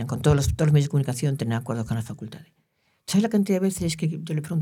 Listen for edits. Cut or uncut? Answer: uncut